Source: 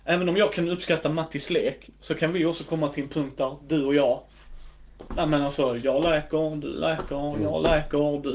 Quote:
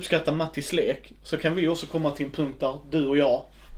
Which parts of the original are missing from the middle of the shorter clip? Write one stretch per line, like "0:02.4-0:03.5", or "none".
none